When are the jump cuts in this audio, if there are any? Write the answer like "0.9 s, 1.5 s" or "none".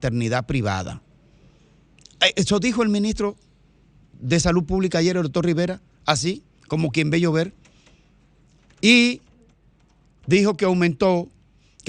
none